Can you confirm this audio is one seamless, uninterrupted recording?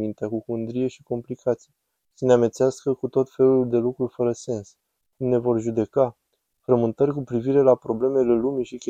no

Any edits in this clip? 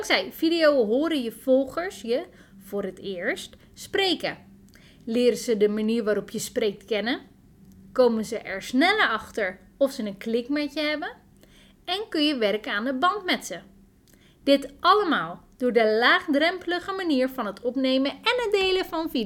no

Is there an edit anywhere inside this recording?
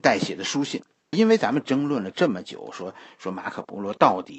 yes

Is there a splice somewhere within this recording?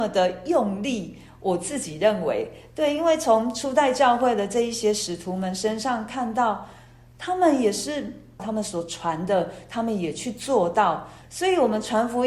yes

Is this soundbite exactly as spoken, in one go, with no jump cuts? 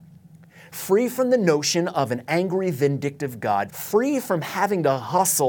no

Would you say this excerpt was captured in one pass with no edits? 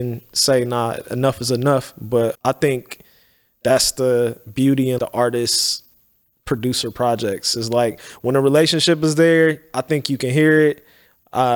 no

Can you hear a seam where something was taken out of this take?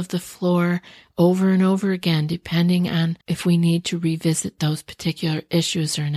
yes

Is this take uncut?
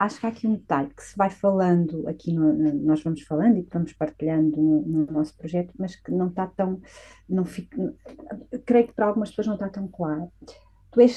yes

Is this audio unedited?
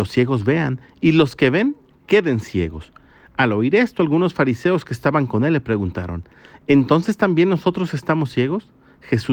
yes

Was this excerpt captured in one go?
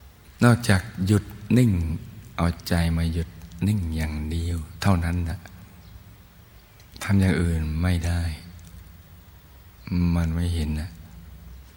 yes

